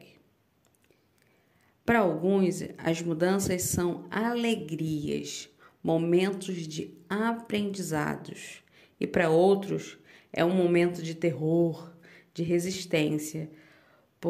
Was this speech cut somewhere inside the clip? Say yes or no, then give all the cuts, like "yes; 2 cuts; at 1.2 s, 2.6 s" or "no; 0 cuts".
no; 0 cuts